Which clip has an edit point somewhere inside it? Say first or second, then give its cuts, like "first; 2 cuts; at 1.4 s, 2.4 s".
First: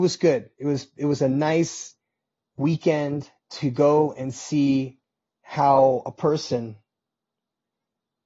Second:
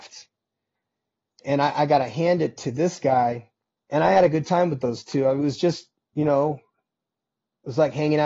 second; 1 cut; at 3.8 s